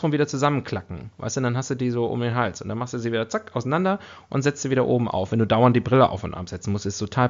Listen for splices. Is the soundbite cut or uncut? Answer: uncut